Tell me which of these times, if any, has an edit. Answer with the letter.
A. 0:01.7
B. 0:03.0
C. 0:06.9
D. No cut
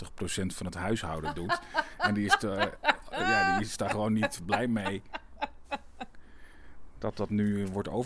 D